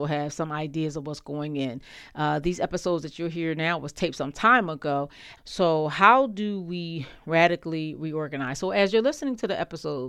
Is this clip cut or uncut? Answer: cut